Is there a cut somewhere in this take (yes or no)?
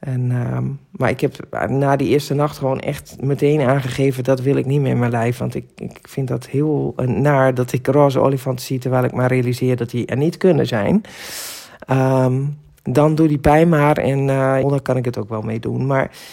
yes